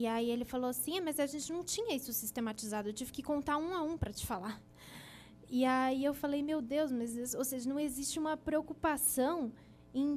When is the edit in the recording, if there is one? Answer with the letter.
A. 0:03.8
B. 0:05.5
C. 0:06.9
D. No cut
D